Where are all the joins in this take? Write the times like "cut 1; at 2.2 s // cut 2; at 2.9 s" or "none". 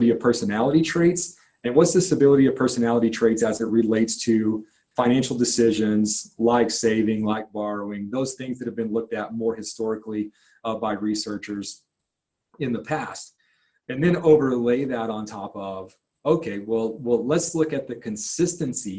none